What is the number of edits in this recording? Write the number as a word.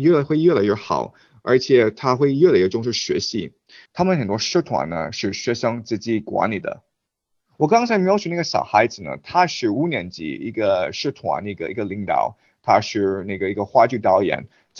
one